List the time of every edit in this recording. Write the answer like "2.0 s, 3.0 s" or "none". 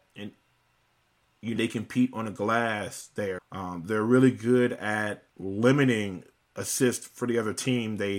1.6 s, 3.4 s, 5.3 s